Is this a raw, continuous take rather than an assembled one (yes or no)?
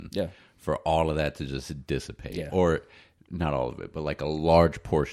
yes